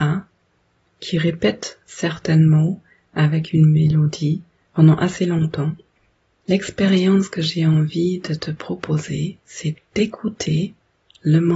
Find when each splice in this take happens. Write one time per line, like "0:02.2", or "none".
0:09.8